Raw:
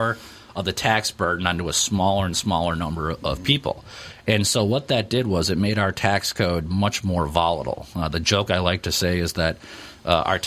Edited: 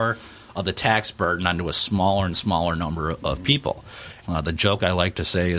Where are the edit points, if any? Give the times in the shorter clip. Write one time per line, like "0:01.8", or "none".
0:04.2